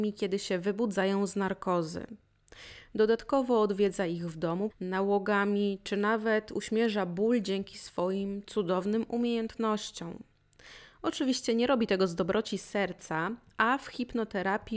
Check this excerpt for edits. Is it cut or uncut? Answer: cut